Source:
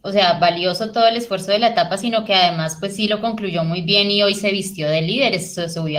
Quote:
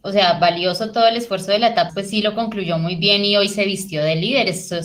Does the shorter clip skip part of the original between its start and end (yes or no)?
yes